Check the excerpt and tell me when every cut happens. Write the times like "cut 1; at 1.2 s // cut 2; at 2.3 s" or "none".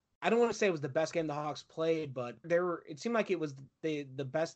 cut 1; at 2.4 s